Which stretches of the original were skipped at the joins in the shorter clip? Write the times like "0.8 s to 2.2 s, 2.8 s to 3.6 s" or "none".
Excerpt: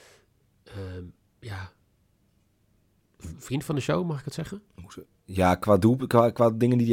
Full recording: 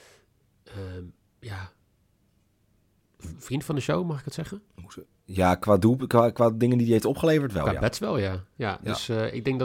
none